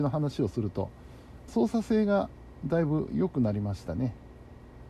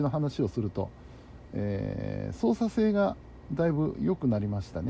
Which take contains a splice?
first; 1 cut; at 1.5 s

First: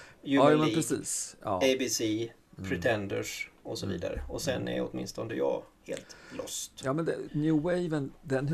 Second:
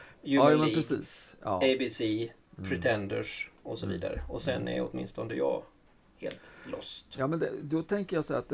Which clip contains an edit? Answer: first; 2 cuts; at 5.7 s, 7.3 s

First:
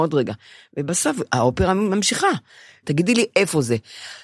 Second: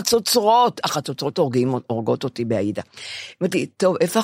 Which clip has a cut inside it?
first; 1 cut; at 2.8 s

